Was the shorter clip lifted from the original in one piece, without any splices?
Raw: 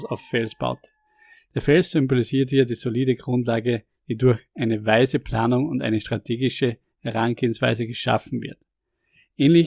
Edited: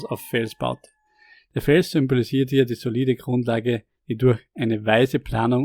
yes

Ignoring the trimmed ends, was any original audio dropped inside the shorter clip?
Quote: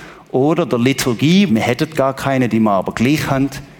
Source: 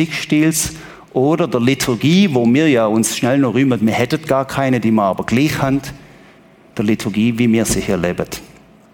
yes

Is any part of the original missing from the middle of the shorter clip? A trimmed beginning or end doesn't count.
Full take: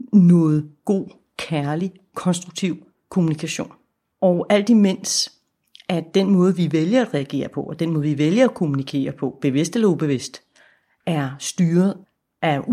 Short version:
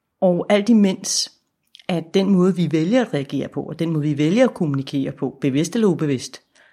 no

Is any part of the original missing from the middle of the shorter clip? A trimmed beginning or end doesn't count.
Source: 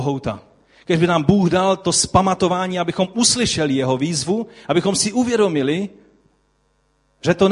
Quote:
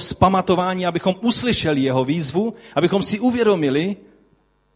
no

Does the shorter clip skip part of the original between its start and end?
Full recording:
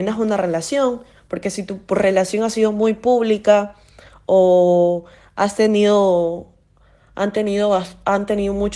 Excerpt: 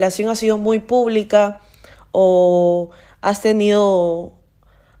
no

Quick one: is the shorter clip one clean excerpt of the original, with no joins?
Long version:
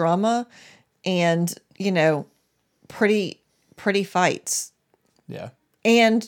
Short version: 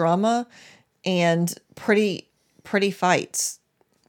no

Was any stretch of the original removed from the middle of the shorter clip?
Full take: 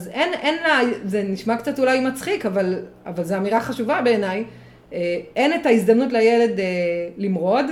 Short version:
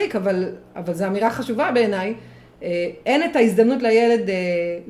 no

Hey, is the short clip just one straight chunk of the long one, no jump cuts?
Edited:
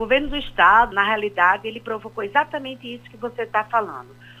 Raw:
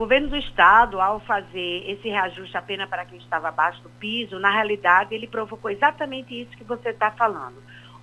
no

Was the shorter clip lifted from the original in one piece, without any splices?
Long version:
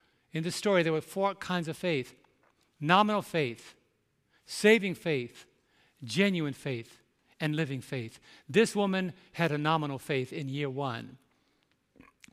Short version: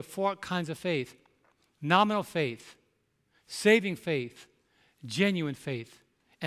yes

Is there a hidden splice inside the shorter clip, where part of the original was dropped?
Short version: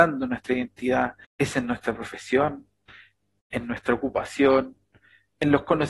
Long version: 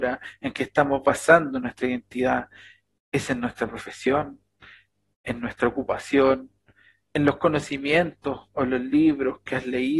yes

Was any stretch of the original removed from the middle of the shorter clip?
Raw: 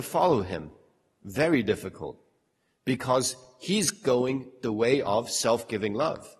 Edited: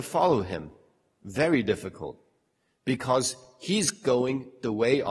no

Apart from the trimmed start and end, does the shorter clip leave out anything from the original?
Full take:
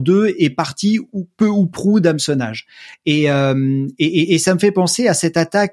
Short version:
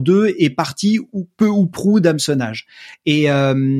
no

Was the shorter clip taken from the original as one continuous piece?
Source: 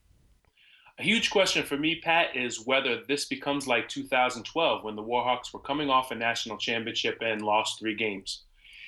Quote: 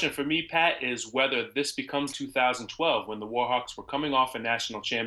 no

